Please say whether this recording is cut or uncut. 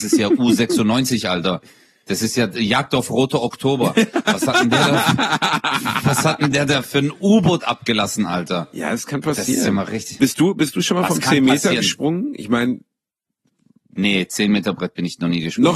uncut